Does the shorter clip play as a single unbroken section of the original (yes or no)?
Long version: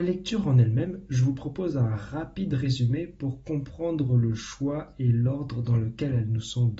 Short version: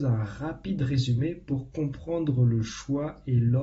yes